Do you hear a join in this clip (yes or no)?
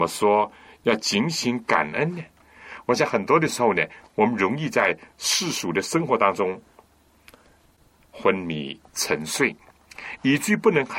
no